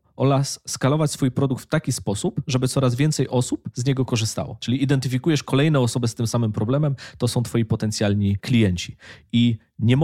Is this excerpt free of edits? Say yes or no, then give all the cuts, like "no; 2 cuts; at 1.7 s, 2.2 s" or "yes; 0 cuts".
yes; 0 cuts